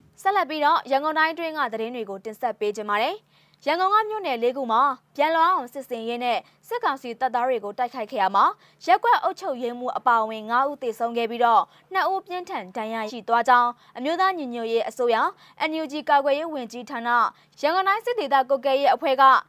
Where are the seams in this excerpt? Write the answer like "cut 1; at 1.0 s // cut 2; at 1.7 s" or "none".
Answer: cut 1; at 13.1 s